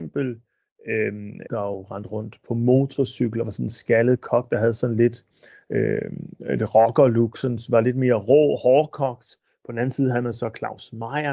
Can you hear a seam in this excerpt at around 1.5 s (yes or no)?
yes